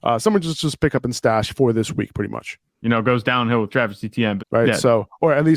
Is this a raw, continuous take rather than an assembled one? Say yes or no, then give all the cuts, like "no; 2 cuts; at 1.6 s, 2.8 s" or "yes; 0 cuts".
no; 2 cuts; at 2.8 s, 4.4 s